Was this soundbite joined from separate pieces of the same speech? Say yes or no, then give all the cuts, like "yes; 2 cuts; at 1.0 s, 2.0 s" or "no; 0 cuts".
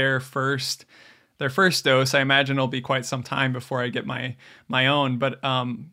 no; 0 cuts